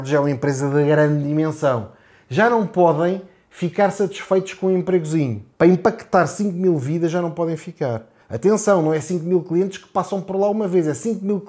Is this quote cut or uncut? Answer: cut